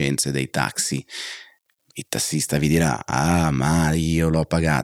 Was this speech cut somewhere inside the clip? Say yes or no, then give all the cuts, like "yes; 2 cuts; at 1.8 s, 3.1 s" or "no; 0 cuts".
no; 0 cuts